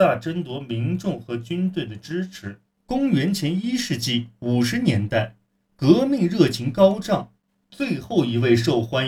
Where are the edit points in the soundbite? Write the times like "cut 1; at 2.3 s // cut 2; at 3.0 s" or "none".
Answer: none